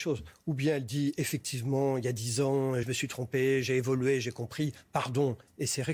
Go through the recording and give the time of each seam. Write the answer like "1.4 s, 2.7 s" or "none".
2.8 s

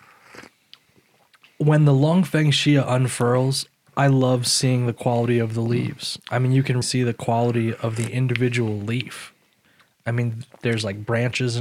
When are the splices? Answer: 1.4 s, 6.8 s

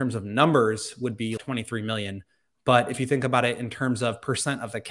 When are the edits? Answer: 1.4 s

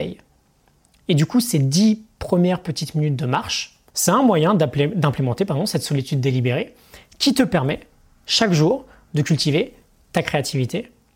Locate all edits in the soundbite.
3.9 s

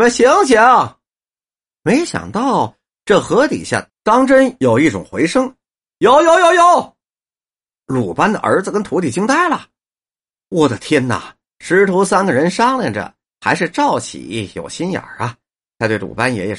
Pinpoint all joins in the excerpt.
11.5 s

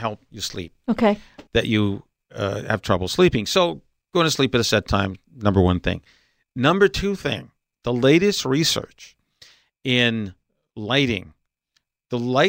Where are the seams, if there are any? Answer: 1.5 s

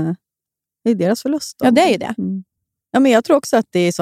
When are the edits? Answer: none

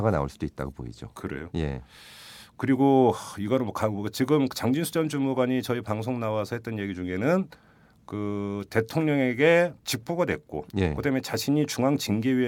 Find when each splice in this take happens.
9.8 s

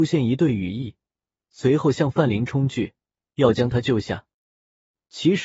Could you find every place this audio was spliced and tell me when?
none

